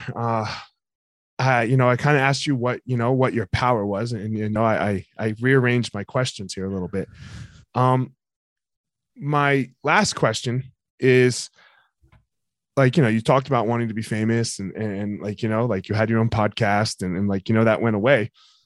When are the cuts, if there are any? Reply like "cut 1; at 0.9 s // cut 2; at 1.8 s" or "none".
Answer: cut 1; at 4.6 s